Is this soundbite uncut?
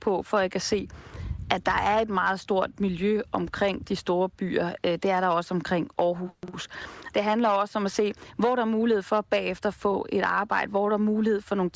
no; 1 cut; at 7.1 s

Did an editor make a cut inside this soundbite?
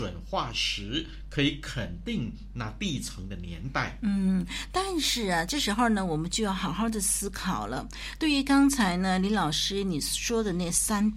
no; 0 cuts

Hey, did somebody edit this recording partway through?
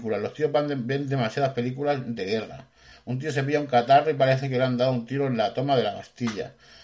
no; 0 cuts

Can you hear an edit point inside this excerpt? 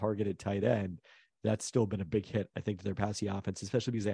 no; 0 cuts

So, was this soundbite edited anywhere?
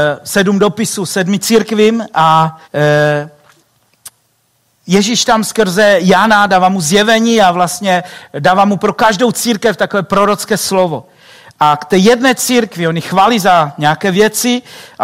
yes; 1 cut; at 2.6 s

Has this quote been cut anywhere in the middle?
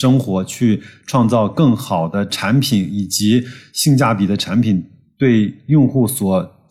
no; 0 cuts

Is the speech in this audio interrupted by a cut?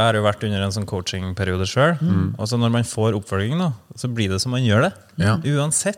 no; 0 cuts

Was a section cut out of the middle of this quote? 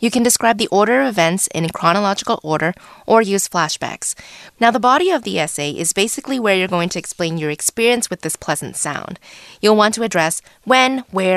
yes; 1 cut; at 4.5 s

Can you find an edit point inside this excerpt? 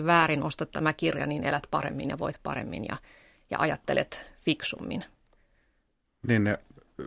yes; 1 cut; at 6.1 s

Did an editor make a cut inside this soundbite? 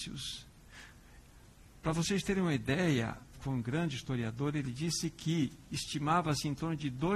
yes; 1 cut; at 3.3 s

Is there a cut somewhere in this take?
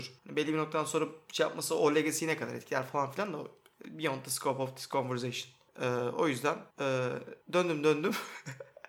no; 0 cuts

